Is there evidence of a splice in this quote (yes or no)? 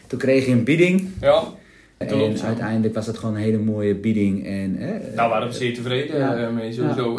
yes